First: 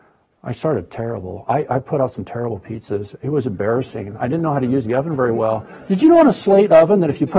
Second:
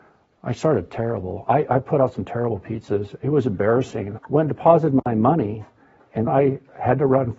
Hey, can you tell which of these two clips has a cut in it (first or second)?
second